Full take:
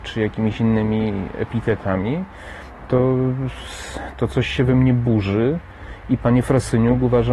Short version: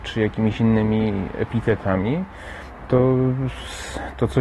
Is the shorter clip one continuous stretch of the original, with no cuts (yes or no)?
yes